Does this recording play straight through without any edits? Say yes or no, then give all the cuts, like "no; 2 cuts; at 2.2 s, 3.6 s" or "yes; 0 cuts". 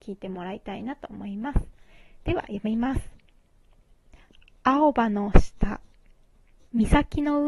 yes; 0 cuts